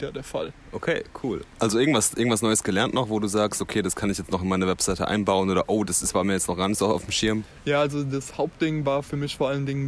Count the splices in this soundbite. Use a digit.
0